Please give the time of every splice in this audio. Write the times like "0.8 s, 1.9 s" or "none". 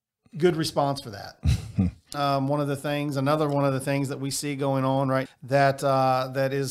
2.1 s, 5.3 s